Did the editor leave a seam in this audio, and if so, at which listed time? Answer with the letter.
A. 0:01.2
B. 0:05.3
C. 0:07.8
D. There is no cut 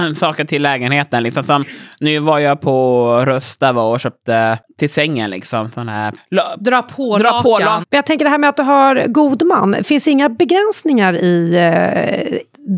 C